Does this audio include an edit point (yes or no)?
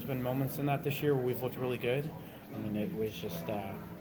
yes